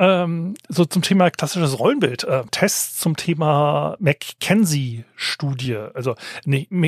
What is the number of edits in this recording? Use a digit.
1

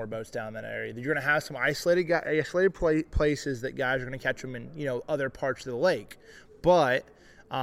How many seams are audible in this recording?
0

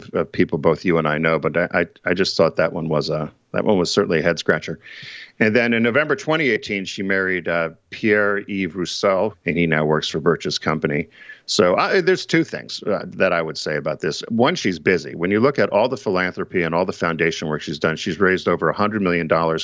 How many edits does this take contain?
1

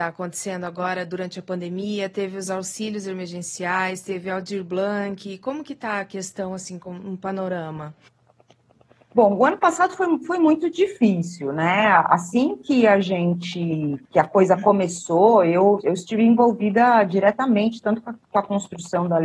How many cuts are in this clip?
1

